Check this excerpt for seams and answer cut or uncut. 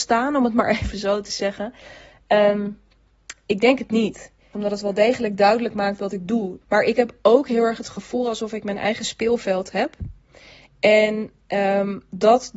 cut